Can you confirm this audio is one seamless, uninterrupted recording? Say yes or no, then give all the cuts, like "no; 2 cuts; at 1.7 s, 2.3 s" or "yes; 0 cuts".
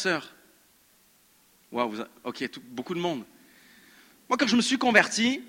yes; 0 cuts